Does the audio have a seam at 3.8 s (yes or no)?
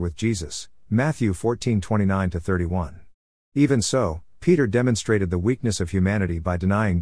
no